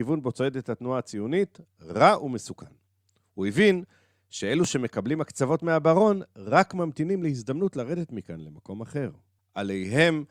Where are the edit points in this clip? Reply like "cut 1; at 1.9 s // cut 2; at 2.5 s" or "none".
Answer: cut 1; at 9.4 s